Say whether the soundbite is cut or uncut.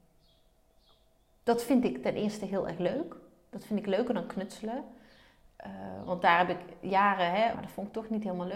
cut